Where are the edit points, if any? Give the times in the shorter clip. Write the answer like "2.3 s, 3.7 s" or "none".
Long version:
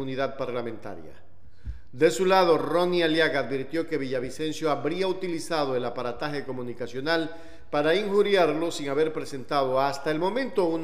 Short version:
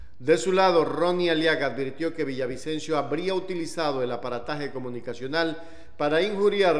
none

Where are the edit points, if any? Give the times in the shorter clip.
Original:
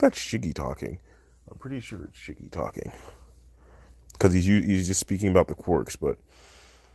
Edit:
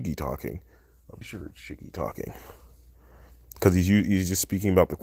1.2 s

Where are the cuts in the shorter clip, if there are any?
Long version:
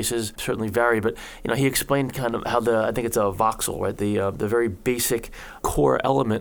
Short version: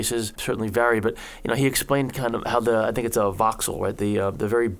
none

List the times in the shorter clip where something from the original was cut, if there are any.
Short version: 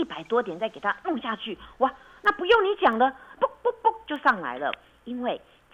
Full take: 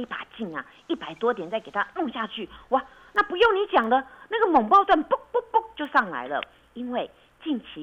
3.4 s

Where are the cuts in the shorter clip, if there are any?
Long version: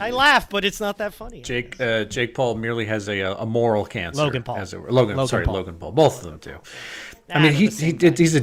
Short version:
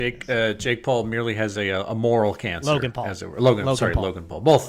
none

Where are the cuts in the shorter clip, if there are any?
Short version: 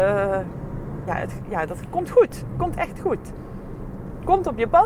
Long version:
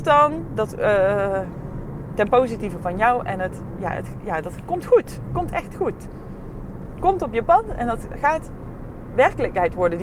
1.1 s

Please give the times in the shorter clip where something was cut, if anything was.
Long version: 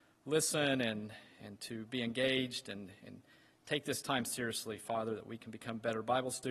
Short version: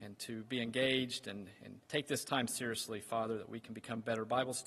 1.8 s

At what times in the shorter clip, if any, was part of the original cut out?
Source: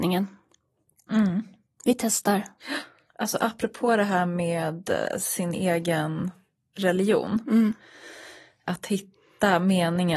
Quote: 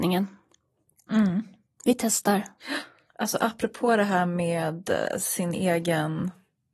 none

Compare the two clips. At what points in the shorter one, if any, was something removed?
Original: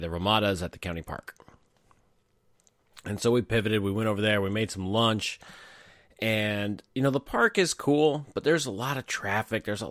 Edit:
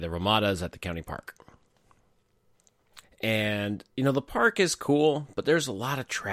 3.0 s

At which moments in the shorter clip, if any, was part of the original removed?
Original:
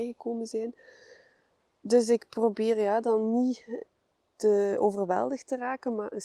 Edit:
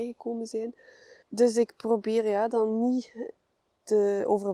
1.2 s

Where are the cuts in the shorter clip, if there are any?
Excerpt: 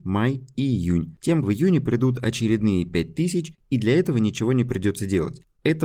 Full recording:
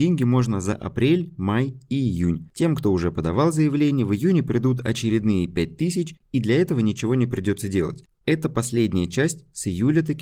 1.4 s

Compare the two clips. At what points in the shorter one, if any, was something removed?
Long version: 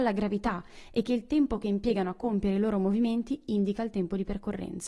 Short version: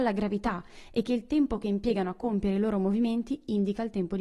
none

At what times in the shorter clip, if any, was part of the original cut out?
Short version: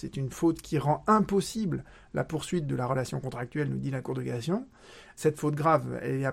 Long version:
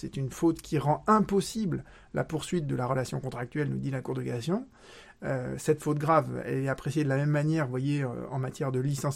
5.2 s

